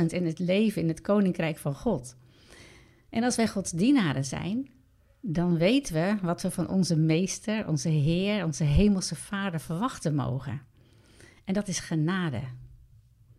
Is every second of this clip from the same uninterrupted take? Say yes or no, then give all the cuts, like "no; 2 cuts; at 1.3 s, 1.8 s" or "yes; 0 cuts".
yes; 0 cuts